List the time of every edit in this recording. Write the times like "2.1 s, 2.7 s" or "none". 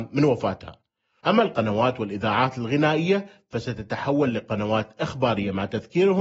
1.2 s